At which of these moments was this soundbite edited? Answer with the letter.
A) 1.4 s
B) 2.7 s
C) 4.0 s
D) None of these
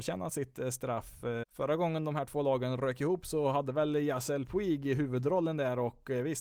A